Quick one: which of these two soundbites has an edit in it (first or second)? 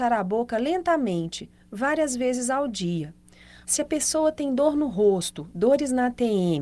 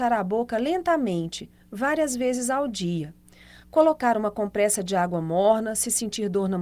first